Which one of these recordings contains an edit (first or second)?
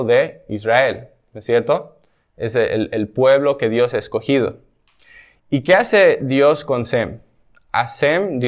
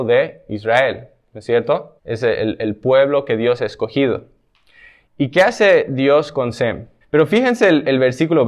second